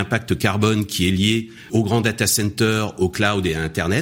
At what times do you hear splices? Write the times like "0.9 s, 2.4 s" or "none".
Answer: 1.7 s